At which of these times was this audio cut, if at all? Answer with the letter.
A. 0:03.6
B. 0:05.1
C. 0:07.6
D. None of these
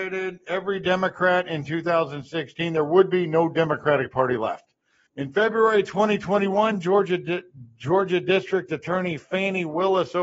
B